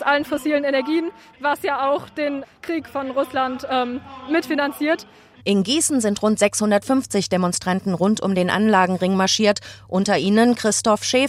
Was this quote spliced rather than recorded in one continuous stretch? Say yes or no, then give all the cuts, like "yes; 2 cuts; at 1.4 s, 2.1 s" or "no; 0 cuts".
yes; 1 cut; at 5.4 s